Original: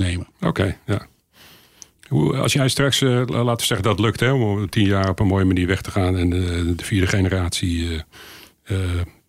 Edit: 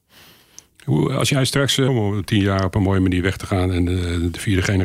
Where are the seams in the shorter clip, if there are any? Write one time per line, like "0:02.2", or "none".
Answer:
0:01.9